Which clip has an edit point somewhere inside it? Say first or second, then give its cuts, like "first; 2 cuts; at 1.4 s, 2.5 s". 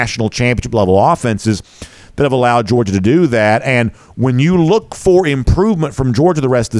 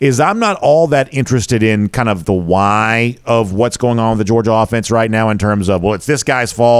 second; 1 cut; at 2.2 s